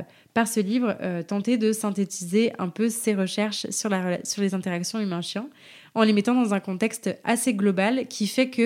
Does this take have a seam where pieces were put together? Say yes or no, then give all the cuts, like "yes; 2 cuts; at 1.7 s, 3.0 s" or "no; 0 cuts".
no; 0 cuts